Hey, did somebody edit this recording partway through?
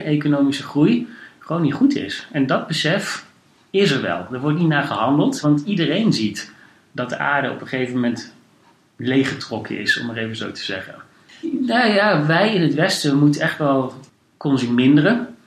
yes; 2 cuts; at 5.4 s, 11.4 s

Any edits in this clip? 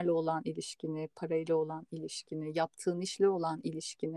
no; 0 cuts

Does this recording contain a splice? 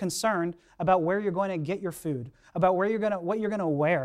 no; 0 cuts

